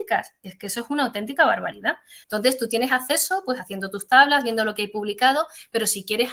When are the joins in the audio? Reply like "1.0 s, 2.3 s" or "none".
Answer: 2.2 s